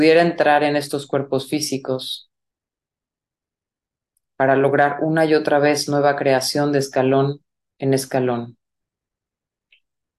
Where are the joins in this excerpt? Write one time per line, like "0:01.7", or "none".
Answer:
none